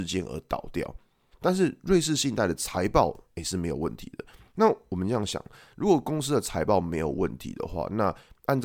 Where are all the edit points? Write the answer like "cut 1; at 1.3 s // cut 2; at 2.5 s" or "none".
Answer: cut 1; at 1.3 s